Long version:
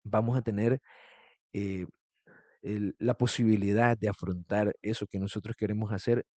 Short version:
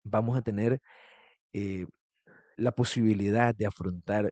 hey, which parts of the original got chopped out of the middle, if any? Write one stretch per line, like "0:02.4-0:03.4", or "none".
0:02.5-0:03.0